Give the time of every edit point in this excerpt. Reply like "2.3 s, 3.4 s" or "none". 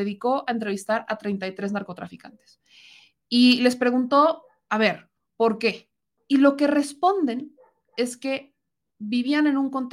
6.2 s